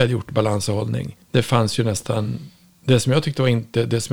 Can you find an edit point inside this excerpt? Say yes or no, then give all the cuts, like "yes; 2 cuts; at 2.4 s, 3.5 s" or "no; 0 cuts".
yes; 1 cut; at 1.2 s